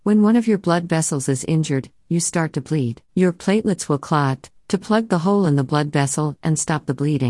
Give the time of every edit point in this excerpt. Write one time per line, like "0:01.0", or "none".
0:03.1
0:04.6